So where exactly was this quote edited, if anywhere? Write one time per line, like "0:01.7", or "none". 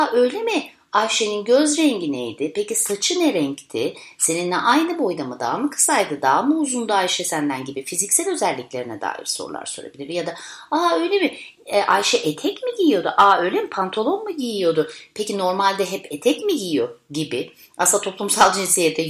none